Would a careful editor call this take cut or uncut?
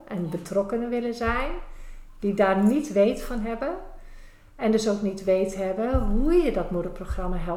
uncut